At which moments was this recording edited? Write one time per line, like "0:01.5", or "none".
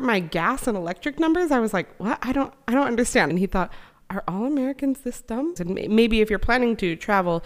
0:03.3
0:05.6